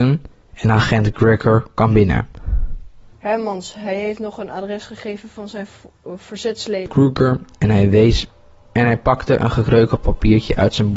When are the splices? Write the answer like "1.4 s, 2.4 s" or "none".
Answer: 3.1 s